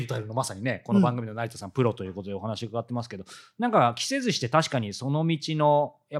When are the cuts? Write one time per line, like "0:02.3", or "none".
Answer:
none